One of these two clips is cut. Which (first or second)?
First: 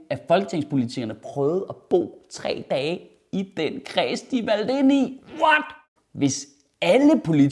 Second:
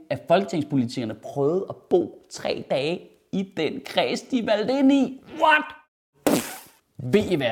first